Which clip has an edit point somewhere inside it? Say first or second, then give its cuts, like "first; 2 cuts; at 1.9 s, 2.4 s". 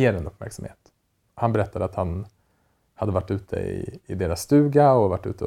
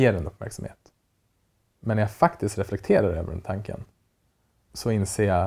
first; 1 cut; at 1.3 s